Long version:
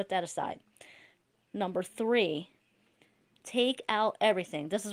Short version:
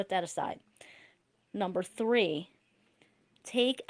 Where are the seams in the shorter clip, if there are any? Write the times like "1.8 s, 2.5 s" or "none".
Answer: none